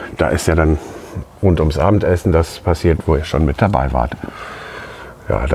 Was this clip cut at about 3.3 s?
no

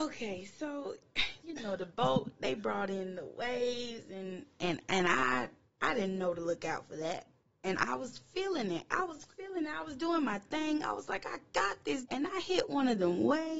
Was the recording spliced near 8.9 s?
no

